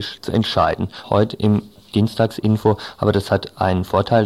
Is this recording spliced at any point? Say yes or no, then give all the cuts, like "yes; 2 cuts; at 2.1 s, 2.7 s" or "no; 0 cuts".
yes; 1 cut; at 1.0 s